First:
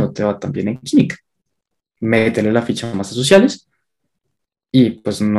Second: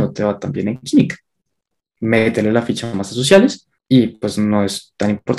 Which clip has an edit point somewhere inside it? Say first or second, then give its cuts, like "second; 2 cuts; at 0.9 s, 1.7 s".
second; 1 cut; at 3.8 s